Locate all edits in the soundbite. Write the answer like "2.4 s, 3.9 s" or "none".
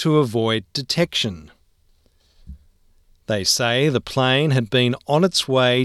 none